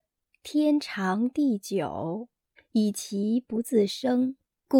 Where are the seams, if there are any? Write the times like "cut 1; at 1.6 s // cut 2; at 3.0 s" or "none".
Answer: cut 1; at 2.6 s